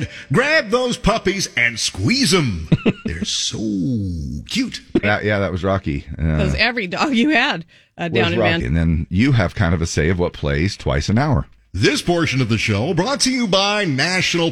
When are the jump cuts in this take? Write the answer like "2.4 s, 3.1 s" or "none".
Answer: 5.0 s, 8.6 s